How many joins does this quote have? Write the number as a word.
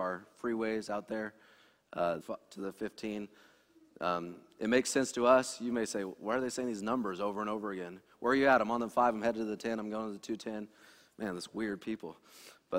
one